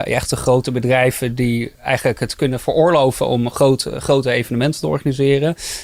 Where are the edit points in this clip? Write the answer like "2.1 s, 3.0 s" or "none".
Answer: 1.7 s